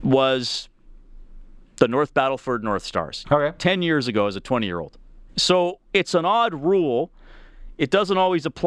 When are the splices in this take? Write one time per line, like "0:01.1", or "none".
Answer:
0:03.2
0:05.3